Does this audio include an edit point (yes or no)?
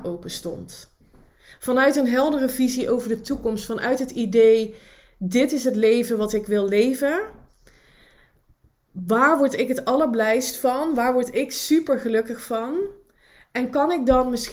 yes